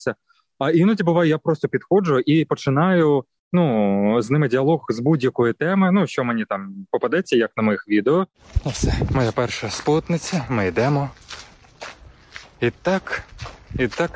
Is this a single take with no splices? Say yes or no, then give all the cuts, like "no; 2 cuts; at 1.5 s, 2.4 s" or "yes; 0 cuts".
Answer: yes; 0 cuts